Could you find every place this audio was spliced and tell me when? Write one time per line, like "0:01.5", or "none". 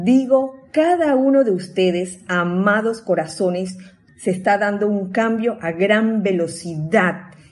0:04.1

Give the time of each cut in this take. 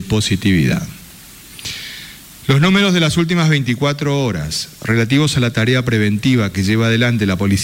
0:02.4

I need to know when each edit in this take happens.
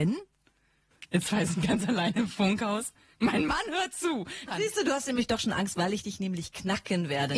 0:04.5

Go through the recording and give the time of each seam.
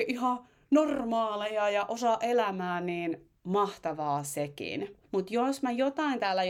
0:05.0

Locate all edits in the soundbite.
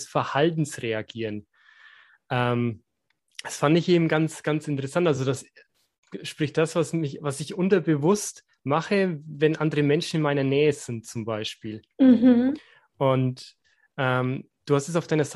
none

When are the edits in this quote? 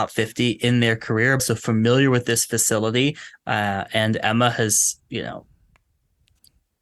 0:01.4

